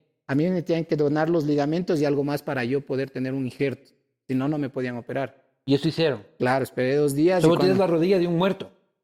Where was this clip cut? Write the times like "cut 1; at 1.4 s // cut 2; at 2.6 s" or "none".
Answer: none